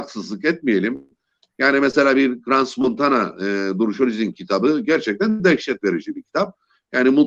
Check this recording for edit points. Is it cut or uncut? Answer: uncut